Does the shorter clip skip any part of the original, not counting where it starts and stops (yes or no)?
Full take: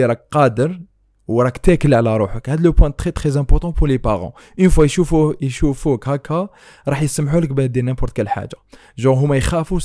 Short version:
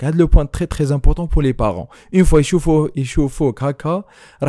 no